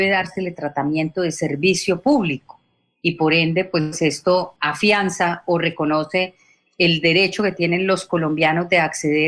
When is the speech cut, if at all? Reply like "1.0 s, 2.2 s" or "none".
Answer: 4.6 s